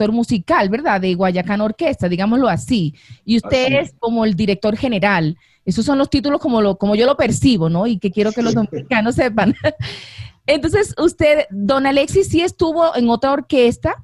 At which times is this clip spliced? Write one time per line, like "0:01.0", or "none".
none